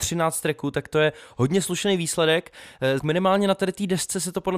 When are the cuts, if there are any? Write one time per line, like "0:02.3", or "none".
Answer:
0:03.0